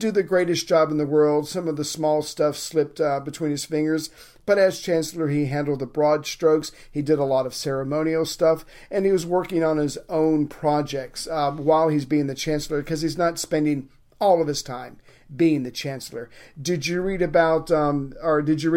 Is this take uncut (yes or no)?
yes